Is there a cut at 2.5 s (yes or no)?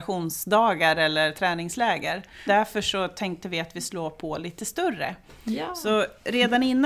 yes